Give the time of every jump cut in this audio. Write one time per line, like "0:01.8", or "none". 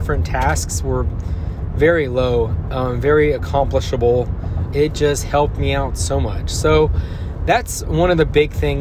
0:04.7